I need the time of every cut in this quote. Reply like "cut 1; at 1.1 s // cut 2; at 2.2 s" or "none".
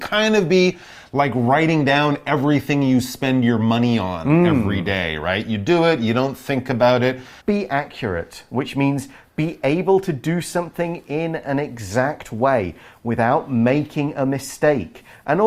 cut 1; at 7.4 s

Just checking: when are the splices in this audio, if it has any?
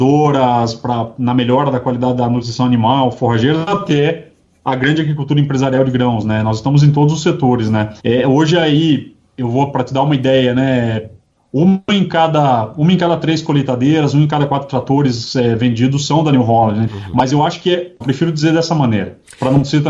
cut 1; at 8.0 s // cut 2; at 16.9 s // cut 3; at 18.0 s

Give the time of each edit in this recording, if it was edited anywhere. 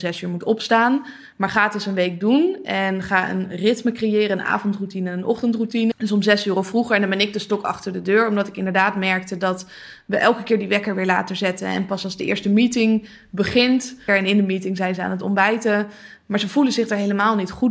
cut 1; at 5.9 s // cut 2; at 14.1 s

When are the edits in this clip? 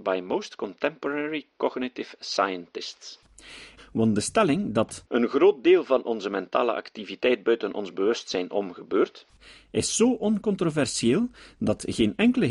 cut 1; at 3.8 s

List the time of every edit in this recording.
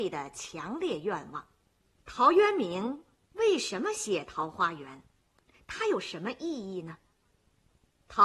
cut 1; at 2.0 s

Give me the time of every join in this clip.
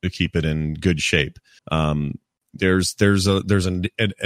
cut 1; at 1.6 s

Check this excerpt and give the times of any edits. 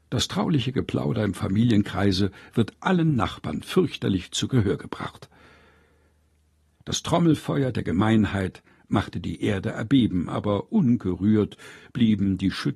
cut 1; at 6.7 s

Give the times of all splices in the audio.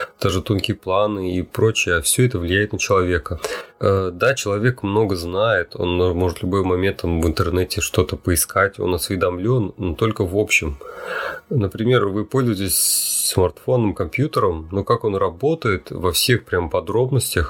none

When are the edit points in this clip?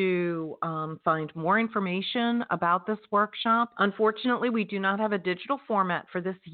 cut 1; at 3.7 s

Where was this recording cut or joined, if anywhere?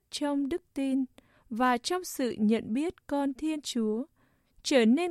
none

